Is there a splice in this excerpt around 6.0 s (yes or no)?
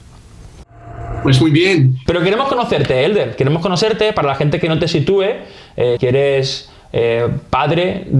yes